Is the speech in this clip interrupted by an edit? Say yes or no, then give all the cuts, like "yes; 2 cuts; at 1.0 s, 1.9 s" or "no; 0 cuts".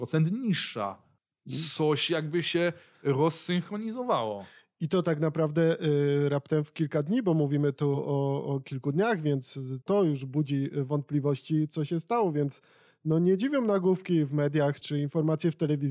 no; 0 cuts